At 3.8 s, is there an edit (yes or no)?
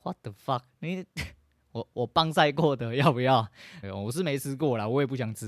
yes